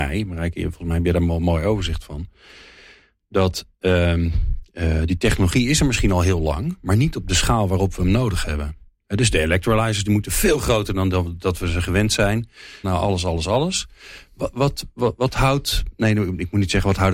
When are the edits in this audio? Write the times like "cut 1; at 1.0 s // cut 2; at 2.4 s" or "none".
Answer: cut 1; at 12.8 s